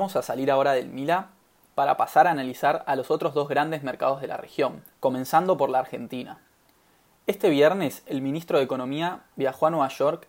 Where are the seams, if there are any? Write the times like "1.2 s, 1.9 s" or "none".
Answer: 4.9 s